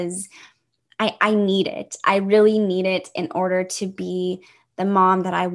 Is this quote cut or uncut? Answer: uncut